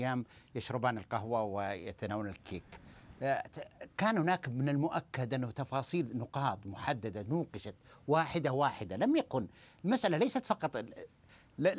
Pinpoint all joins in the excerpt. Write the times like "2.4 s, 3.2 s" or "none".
none